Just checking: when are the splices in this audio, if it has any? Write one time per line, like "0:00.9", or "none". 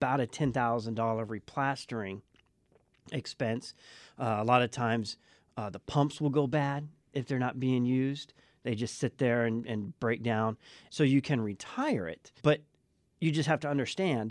0:10.9
0:12.4

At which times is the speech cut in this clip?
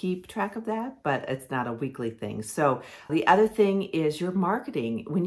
0:03.1

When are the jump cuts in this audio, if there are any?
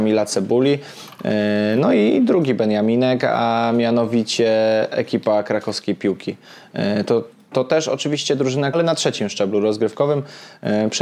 0:08.7

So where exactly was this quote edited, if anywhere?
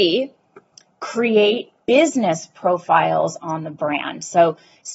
0:01.8

